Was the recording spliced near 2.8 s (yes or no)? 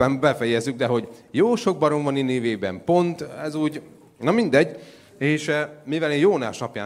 no